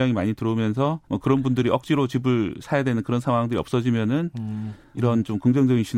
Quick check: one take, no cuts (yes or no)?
no